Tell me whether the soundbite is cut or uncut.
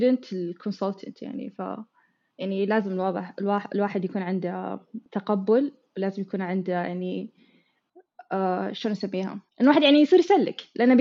cut